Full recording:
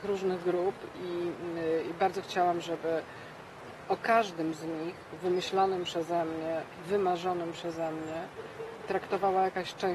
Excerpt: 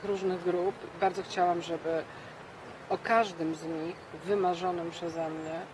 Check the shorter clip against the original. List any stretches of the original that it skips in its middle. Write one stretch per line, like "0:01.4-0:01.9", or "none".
0:00.9-0:01.9
0:05.2-0:06.8